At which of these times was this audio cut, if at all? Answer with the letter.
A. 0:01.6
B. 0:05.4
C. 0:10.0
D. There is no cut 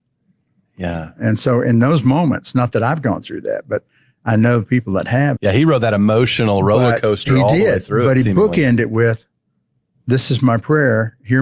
B